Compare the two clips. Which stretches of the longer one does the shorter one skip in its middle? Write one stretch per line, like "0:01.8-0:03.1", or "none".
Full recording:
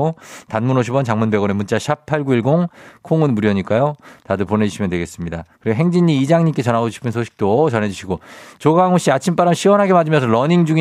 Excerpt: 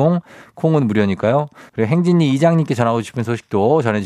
0:04.2-0:05.6